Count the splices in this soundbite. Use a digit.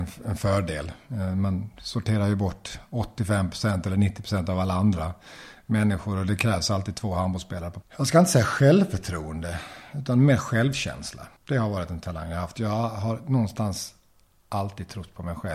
2